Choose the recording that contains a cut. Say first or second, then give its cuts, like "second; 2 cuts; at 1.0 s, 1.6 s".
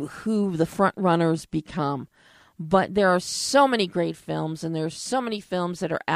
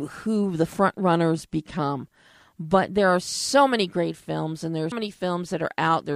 second; 1 cut; at 4.9 s